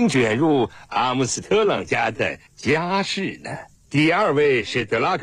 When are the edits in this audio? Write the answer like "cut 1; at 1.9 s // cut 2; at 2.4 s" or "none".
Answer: cut 1; at 3.8 s